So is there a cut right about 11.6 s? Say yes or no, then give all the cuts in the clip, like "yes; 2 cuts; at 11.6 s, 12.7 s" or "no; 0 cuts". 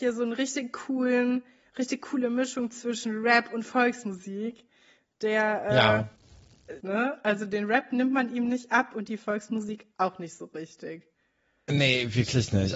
no; 1 cut; at 6.8 s